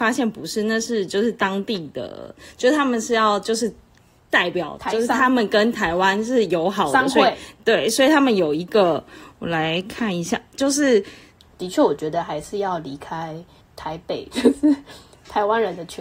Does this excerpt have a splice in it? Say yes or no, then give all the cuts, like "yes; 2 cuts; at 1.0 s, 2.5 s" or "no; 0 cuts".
yes; 2 cuts; at 11.4 s, 14.3 s